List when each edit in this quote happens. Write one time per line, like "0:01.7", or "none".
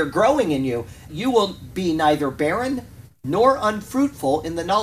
0:01.1